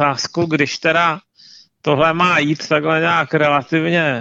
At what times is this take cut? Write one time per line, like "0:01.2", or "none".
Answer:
none